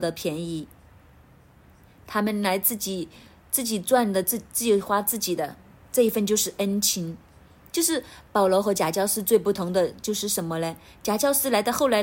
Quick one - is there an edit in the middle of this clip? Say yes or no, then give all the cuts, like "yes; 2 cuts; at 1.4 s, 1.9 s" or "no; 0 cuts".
no; 0 cuts